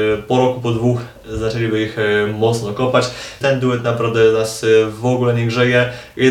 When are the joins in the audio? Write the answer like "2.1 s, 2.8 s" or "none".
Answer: 3.4 s